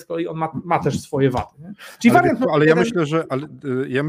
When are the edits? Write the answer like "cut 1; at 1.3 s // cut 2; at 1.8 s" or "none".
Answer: none